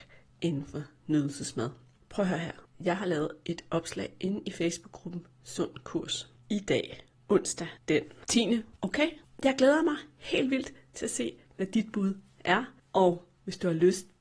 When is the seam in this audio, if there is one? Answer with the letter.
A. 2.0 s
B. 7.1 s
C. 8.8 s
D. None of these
C